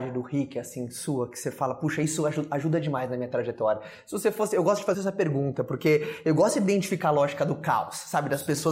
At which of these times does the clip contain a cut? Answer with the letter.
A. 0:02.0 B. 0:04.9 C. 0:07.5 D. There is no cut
B